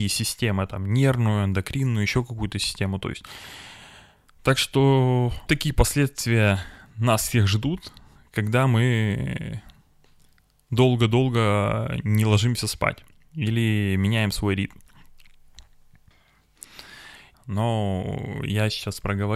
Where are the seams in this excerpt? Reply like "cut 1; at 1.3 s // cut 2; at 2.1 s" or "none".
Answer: cut 1; at 5.5 s // cut 2; at 17.3 s